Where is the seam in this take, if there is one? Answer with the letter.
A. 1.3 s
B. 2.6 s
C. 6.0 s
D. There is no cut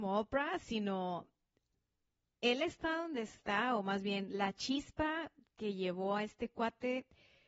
D